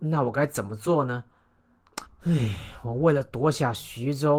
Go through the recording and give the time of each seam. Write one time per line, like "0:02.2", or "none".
0:02.1